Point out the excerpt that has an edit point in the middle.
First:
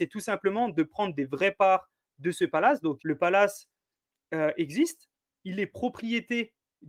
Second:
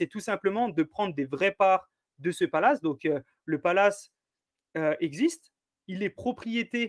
first; 1 cut; at 3.0 s

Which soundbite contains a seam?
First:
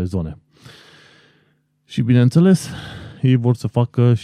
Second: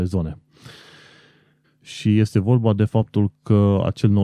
second; 1 cut; at 1.6 s

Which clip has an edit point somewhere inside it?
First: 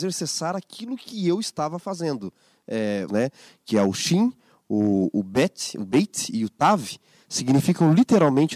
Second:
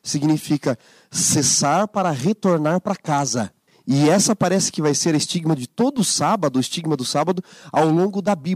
first; 1 cut; at 3.1 s

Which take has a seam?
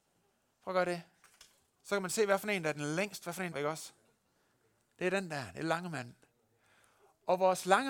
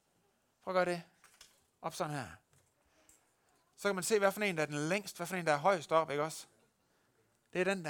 first; 2 cuts; at 1.8 s, 3.5 s

